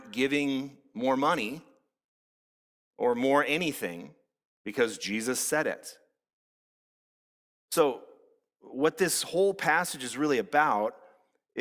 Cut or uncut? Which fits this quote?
uncut